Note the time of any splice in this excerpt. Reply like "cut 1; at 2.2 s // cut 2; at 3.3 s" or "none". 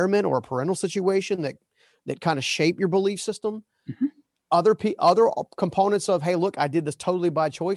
none